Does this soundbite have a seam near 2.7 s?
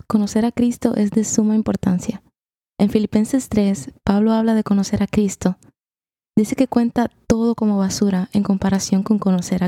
yes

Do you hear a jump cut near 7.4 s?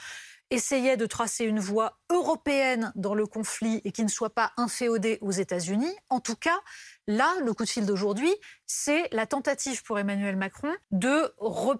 no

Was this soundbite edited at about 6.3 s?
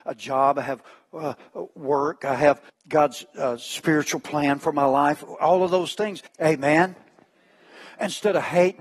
yes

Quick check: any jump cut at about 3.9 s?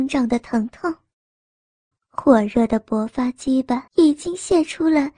yes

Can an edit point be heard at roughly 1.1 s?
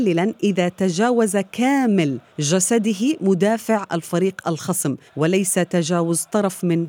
no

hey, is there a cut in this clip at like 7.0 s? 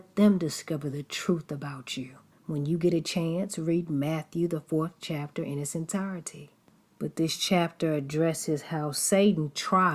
no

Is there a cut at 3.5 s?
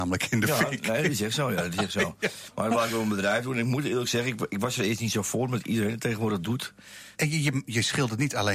no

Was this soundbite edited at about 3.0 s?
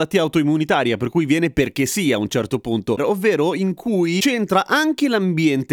yes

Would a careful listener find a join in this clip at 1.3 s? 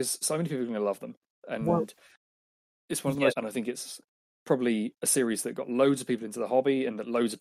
no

